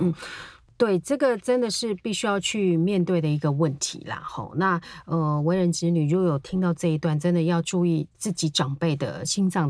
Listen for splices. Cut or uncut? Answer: uncut